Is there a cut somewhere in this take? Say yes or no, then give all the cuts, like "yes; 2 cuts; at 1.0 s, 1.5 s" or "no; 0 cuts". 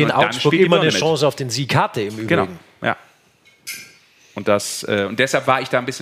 no; 0 cuts